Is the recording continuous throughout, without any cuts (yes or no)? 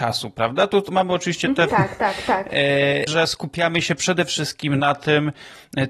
no